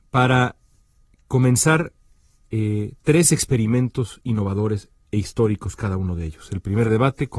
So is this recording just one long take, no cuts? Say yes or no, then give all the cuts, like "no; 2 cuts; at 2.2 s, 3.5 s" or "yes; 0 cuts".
yes; 0 cuts